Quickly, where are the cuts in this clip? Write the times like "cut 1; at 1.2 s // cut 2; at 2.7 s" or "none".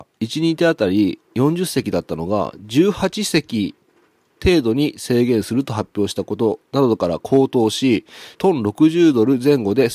cut 1; at 8.3 s